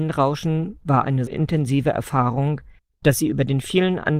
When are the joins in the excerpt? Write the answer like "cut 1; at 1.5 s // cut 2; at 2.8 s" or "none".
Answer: cut 1; at 1.3 s